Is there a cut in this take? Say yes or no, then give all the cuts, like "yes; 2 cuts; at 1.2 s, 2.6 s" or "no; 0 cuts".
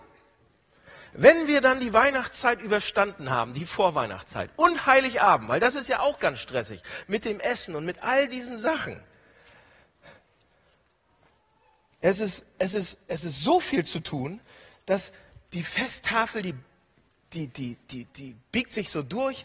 no; 0 cuts